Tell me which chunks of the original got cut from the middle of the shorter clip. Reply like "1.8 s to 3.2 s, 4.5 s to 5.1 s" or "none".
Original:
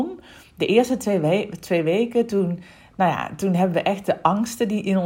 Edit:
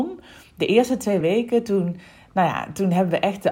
1.2 s to 1.8 s

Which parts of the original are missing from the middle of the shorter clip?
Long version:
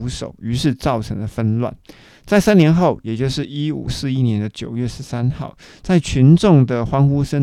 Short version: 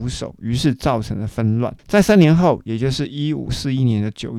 1.8 s to 2.2 s

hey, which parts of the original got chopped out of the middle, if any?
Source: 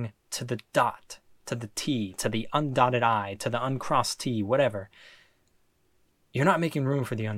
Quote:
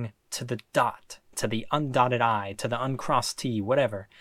1.3 s to 2.1 s

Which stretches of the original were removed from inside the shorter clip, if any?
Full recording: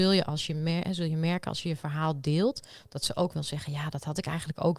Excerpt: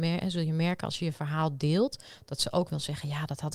none

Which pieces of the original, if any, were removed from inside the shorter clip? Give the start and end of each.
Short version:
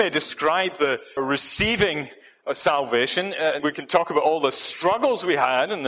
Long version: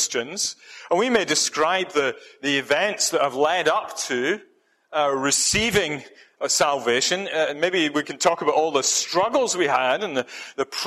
2.3 s to 5.1 s, 7.5 s to 7.9 s

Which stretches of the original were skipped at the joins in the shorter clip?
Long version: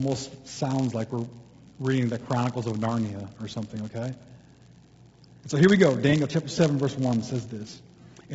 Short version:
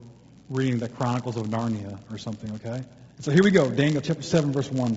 4.4 s to 5.4 s

